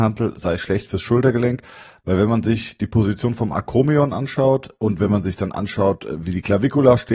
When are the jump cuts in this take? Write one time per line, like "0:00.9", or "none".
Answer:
0:04.8